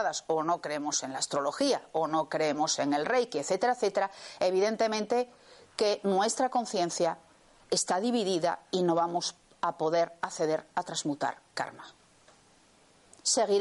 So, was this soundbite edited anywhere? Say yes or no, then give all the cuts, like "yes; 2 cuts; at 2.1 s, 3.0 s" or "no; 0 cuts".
no; 0 cuts